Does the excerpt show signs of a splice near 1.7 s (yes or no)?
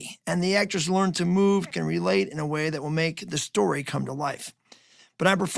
yes